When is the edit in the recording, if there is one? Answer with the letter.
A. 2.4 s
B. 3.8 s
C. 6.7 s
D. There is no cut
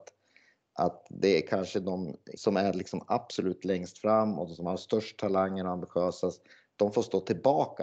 A